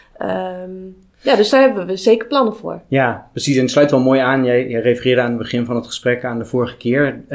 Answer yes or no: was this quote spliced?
no